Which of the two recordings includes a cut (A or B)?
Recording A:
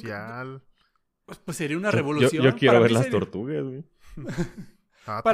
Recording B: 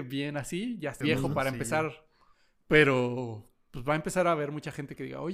B